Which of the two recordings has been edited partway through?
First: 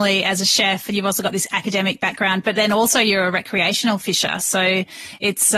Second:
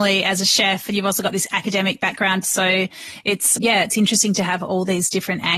second; 2 cuts; at 2.4 s, 3.6 s

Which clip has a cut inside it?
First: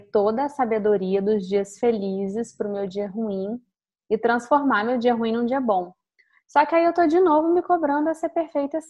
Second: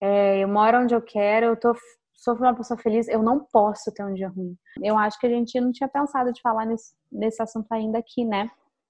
second; 1 cut; at 4.8 s

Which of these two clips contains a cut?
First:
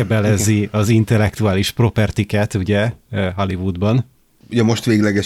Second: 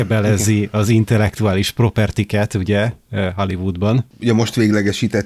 second; 1 cut; at 4.1 s

